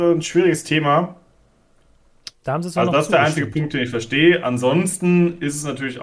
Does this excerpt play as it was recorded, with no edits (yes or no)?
no